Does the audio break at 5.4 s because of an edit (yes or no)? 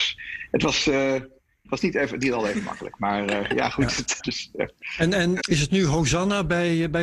yes